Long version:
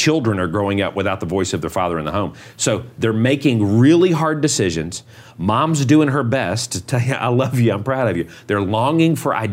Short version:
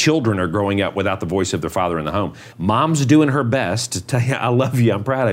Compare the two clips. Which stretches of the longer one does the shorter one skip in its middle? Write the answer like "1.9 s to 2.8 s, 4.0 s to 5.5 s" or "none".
2.5 s to 5.3 s